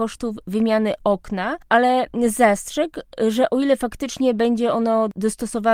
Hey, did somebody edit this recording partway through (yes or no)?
no